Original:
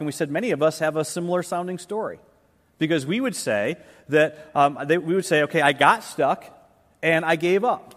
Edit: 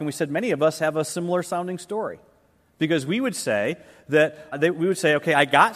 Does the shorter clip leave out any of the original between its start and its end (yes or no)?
yes